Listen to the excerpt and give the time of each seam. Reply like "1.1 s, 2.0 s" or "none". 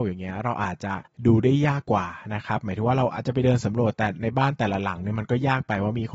1.8 s